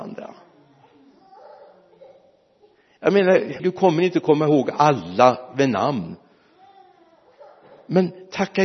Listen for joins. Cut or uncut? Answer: cut